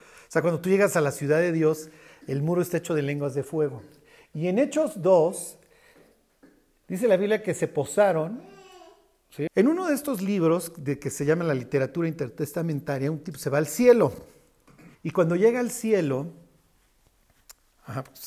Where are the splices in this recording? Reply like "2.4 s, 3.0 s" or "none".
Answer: 9.5 s, 14.9 s